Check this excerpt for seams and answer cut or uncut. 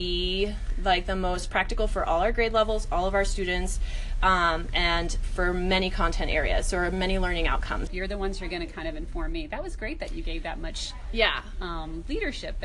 cut